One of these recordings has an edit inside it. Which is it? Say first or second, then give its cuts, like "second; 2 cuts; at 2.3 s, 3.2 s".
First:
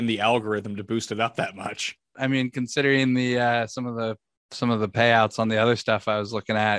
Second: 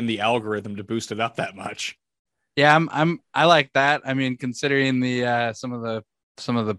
first; 1 cut; at 2.1 s